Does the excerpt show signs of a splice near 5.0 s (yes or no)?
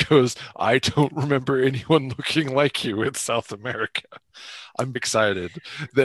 yes